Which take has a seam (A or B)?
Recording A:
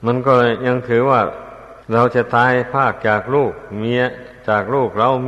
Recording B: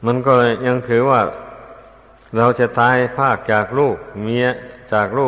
A